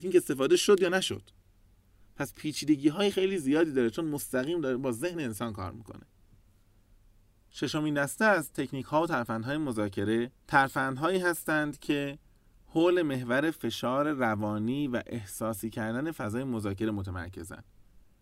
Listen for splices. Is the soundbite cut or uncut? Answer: cut